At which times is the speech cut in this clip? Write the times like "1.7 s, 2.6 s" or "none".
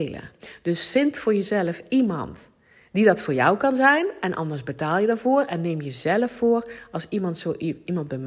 none